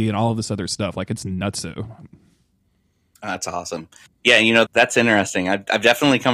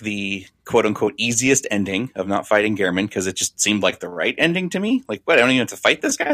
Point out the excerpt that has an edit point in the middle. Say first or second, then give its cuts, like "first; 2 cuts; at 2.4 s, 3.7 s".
first; 1 cut; at 4.7 s